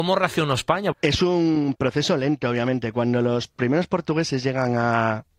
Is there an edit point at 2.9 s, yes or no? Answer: no